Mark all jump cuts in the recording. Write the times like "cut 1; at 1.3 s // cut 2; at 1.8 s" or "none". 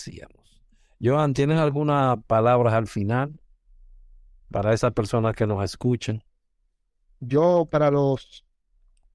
none

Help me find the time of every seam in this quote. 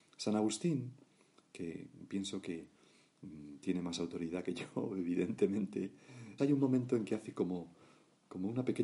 cut 1; at 6.4 s

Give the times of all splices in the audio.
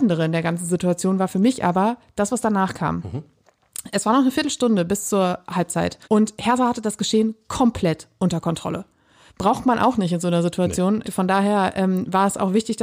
cut 1; at 6.0 s // cut 2; at 9.3 s // cut 3; at 11.0 s

